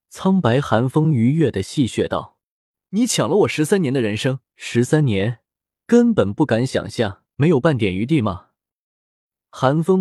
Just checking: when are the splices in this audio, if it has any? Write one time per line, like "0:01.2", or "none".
0:04.4
0:07.3